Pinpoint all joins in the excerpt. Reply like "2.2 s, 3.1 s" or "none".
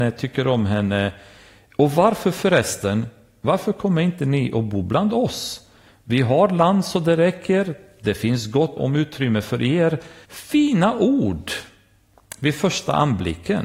8.8 s, 10.2 s